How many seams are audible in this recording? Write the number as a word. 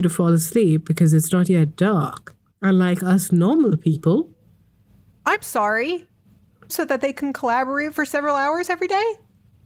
one